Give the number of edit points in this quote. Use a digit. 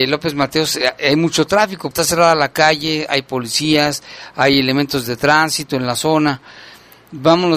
1